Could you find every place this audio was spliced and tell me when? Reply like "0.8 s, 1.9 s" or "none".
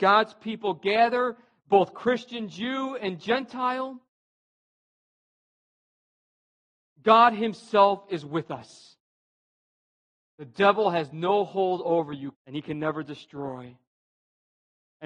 10.2 s, 12.3 s